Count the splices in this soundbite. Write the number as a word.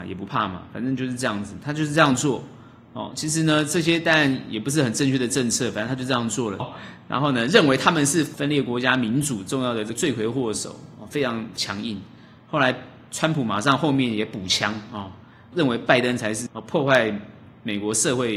one